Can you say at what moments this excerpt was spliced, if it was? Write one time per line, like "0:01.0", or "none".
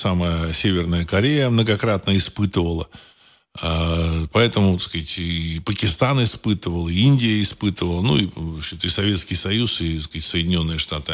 none